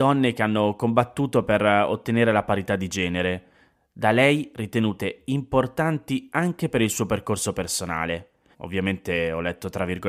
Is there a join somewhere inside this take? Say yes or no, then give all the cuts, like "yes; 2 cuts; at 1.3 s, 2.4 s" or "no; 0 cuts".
yes; 1 cut; at 8.5 s